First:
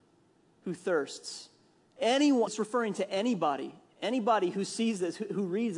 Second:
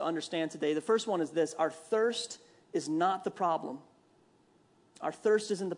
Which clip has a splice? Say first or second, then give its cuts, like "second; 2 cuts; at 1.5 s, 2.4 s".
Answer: first; 1 cut; at 2.5 s